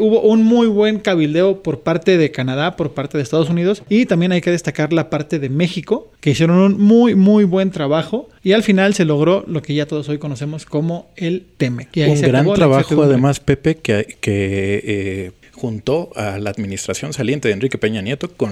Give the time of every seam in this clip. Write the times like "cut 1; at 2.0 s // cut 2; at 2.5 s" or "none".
cut 1; at 11.5 s